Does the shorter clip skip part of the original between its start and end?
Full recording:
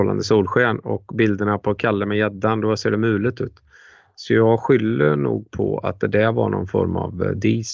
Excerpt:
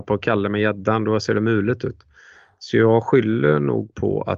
no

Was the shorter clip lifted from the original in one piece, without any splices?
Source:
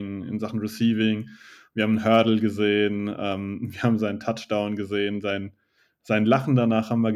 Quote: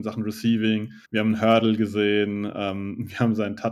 no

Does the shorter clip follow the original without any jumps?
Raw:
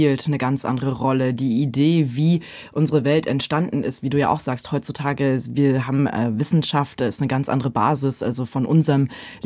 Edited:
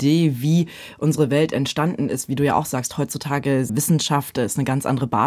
no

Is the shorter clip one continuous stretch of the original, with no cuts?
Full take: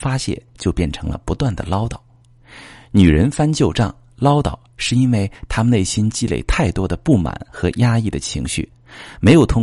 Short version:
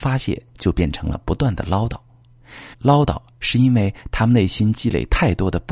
no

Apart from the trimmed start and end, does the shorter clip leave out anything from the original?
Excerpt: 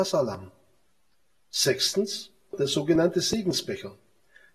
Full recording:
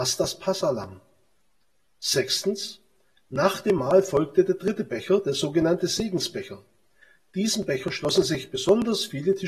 yes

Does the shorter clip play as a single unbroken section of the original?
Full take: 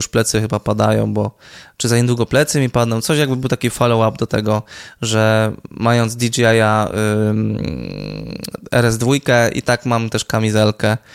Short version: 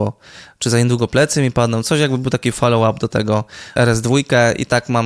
no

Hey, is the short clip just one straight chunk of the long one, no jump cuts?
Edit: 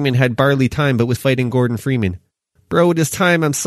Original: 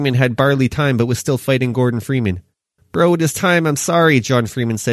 no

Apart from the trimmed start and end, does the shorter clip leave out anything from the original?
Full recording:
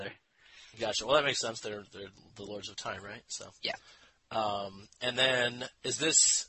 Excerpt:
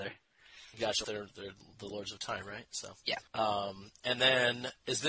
yes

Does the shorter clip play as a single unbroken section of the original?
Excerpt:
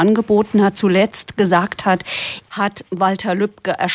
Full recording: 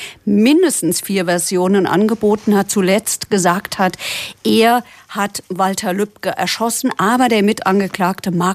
no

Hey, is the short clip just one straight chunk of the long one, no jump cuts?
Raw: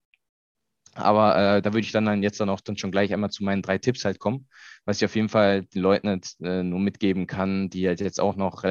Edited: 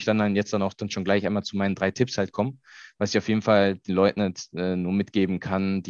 yes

